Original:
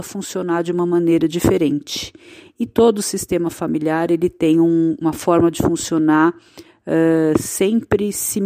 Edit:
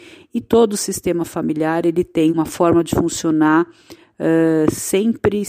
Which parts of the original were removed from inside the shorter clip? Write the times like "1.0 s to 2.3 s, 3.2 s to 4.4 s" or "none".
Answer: 4.6 s to 5.0 s

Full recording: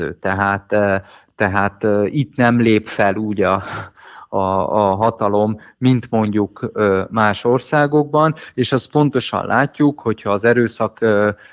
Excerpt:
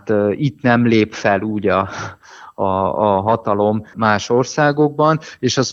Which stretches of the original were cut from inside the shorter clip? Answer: 5.7 s to 7.1 s

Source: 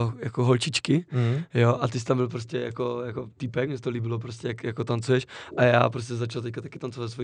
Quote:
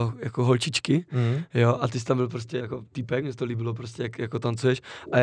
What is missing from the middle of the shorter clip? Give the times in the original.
2.6 s to 3.0 s

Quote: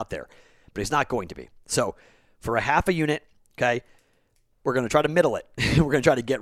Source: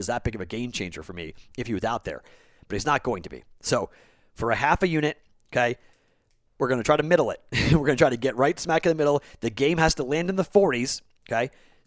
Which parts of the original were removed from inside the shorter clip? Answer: none

